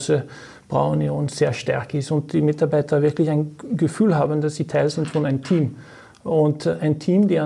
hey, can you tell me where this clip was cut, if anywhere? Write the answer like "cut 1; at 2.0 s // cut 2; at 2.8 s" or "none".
none